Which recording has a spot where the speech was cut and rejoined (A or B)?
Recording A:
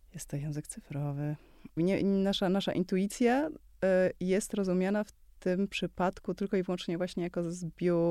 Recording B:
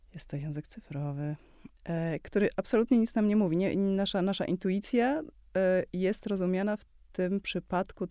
A